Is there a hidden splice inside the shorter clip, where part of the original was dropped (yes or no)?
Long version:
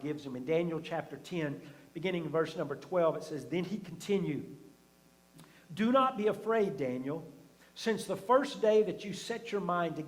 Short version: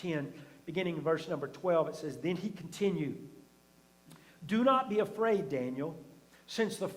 no